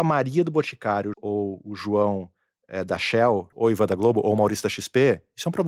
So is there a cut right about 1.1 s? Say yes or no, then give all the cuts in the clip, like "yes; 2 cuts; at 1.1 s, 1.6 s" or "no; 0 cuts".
yes; 2 cuts; at 1.1 s, 3.5 s